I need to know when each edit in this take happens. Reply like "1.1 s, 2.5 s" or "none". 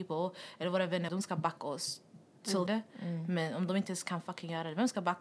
1.1 s, 2.7 s

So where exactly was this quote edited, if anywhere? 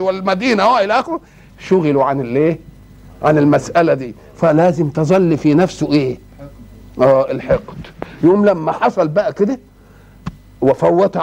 none

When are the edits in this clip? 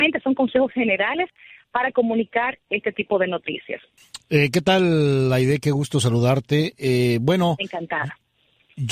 none

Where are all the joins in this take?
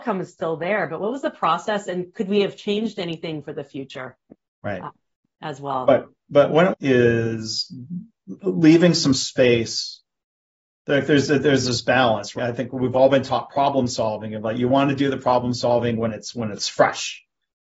6.7 s, 12.4 s

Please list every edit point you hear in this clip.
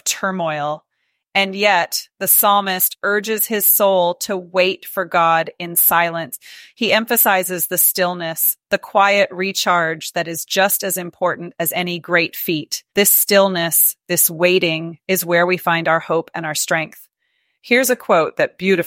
12.9 s

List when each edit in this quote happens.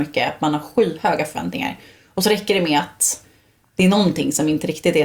none

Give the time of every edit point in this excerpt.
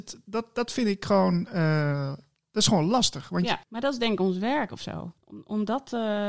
3.6 s, 5.2 s

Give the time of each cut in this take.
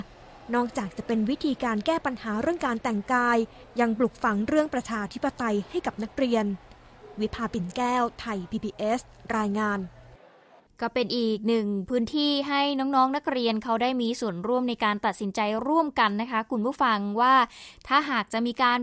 none

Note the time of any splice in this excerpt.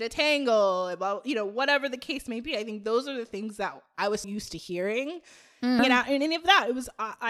4.2 s, 5.8 s

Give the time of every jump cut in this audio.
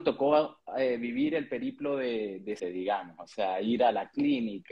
2.6 s

